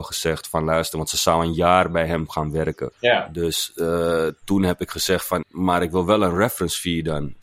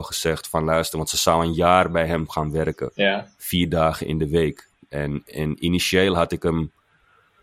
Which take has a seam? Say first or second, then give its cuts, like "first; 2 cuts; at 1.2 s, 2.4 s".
first; 2 cuts; at 2.9 s, 5.4 s